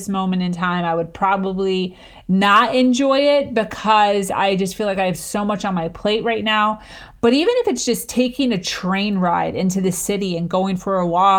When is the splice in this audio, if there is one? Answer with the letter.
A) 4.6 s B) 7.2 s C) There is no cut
B